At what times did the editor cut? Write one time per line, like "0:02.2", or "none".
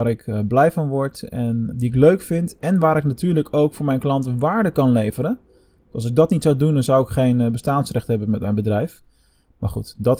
0:01.7

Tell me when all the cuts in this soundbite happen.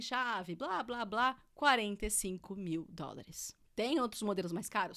none

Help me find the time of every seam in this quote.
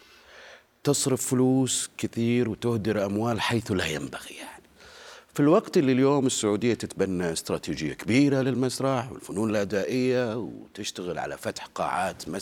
none

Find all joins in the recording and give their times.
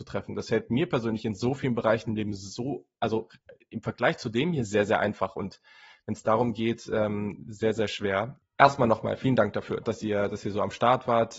0:08.4
0:09.8

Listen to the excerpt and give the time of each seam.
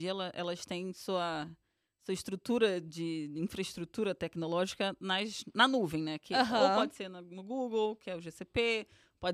none

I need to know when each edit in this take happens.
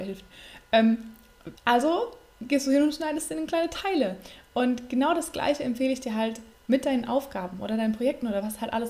0:01.6

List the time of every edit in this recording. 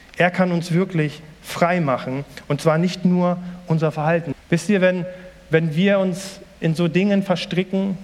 0:04.3

